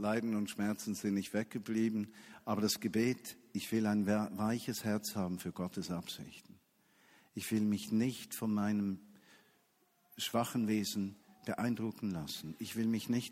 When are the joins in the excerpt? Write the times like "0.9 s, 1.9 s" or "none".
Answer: none